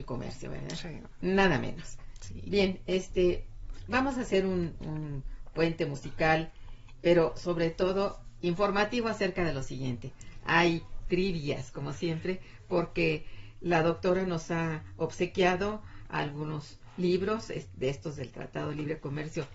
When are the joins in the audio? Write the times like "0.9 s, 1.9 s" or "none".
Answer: none